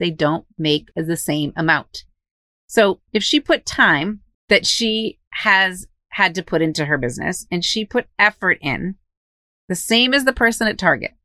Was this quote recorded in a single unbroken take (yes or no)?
yes